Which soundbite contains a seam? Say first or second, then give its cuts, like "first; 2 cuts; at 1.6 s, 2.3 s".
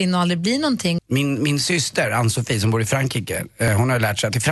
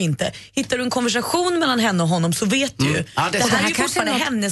first; 1 cut; at 1.0 s